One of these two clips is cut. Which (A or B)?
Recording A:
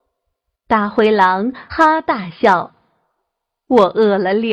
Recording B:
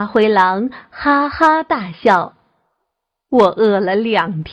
A